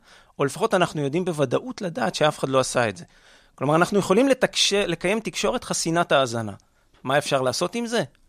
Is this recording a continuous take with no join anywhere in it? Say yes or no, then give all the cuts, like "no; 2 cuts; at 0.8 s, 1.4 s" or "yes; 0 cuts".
yes; 0 cuts